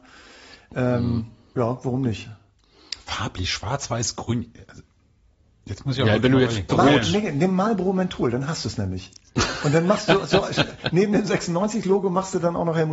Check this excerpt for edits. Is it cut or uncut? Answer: cut